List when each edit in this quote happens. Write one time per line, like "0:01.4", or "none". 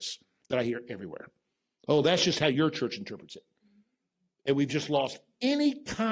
none